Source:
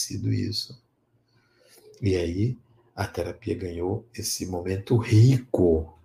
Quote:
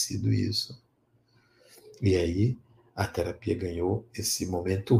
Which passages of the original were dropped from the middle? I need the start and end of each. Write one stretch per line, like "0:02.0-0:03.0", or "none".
none